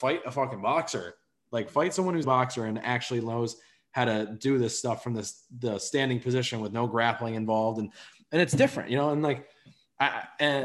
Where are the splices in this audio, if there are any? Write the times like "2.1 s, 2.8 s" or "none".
2.2 s